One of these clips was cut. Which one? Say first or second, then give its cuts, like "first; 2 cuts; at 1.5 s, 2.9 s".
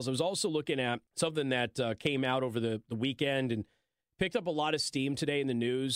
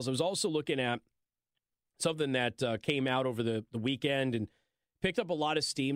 first; 1 cut; at 1.1 s